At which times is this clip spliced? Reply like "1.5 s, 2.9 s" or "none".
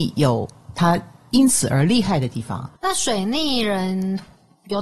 2.8 s